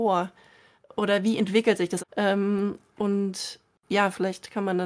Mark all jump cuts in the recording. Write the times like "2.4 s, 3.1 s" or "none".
2.0 s